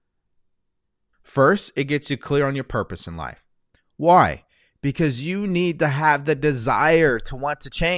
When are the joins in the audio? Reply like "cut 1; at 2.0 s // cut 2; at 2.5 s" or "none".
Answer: cut 1; at 1.1 s

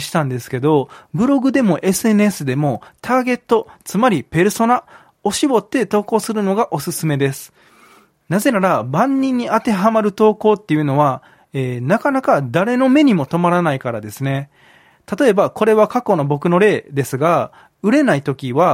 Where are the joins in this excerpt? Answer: none

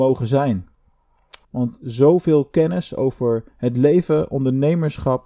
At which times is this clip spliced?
cut 1; at 1.4 s

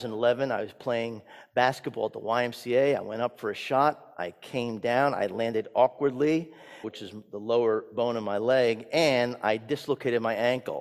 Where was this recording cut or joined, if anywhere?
cut 1; at 6.8 s

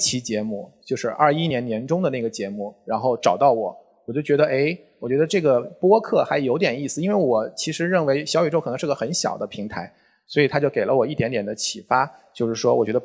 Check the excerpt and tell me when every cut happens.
none

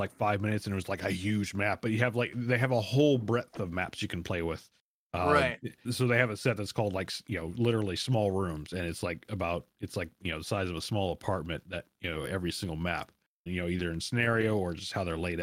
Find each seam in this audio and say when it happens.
cut 1; at 5.8 s // cut 2; at 13.5 s

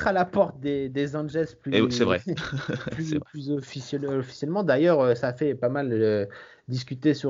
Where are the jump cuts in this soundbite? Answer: none

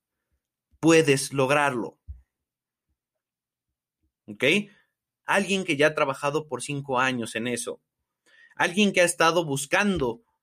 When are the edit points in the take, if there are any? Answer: cut 1; at 5.2 s

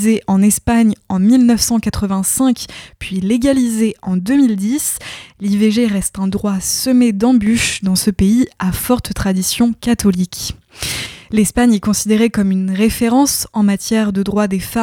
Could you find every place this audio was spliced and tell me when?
none

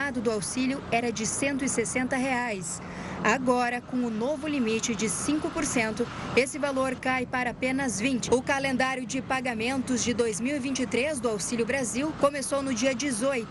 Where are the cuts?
cut 1; at 8.3 s // cut 2; at 12.2 s

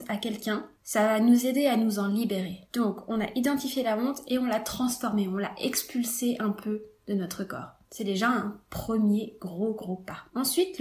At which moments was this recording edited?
none

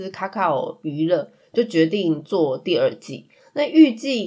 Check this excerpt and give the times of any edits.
none

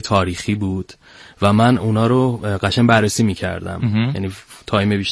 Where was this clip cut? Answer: none

